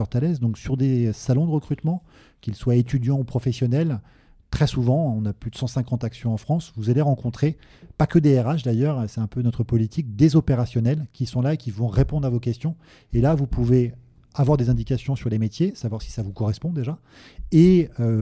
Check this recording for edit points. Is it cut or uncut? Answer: uncut